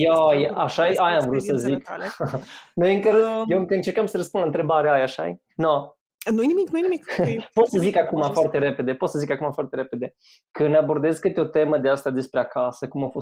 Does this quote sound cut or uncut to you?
uncut